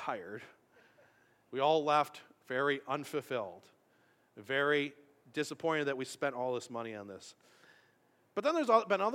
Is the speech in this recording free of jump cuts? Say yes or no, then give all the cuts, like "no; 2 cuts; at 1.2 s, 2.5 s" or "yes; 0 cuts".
yes; 0 cuts